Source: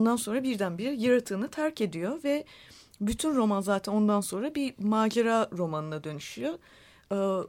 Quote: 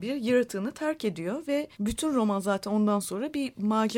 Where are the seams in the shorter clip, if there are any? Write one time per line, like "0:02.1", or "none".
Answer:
0:01.7